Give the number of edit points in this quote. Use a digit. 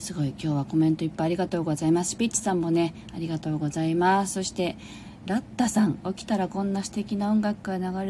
0